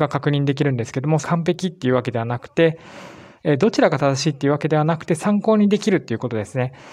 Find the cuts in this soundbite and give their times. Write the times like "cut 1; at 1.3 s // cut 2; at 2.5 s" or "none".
cut 1; at 1.2 s

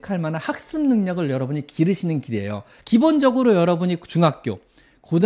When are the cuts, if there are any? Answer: cut 1; at 2.8 s

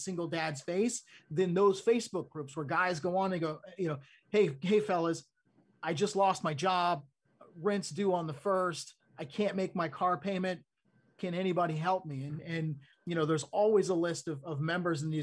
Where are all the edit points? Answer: none

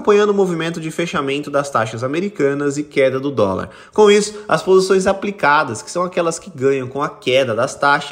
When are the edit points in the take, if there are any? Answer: none

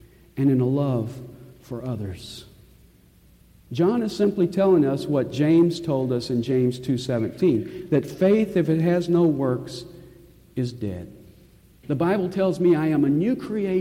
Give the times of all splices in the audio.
cut 1; at 11.8 s

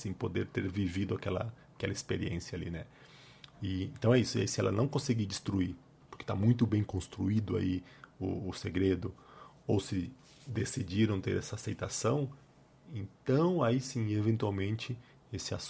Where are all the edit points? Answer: none

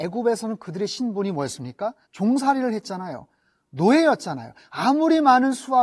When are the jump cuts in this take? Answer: cut 1; at 2.0 s

